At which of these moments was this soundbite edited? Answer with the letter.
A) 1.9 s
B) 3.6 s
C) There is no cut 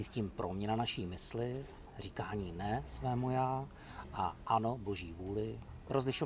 C